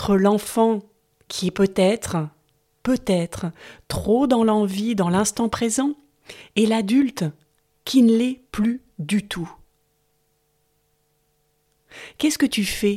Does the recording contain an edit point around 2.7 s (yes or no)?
no